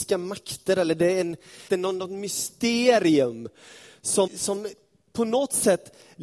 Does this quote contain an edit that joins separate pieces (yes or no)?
yes